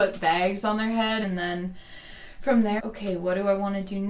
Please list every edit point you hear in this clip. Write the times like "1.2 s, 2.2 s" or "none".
1.2 s, 2.8 s